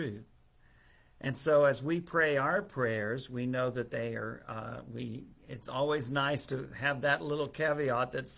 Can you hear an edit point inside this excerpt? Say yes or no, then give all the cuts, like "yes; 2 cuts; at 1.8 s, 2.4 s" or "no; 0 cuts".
no; 0 cuts